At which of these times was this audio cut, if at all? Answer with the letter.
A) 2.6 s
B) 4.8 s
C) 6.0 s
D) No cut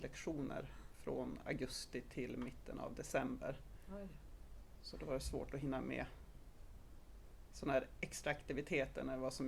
D